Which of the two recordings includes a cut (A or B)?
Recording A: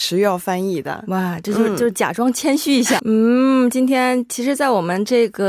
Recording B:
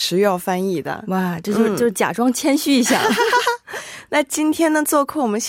A